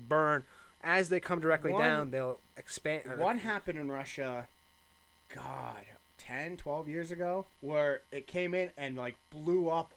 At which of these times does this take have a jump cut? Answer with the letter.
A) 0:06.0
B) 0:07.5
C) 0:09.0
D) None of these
B